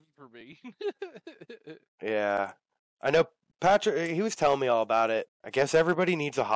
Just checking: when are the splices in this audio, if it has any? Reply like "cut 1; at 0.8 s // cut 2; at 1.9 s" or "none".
cut 1; at 5.3 s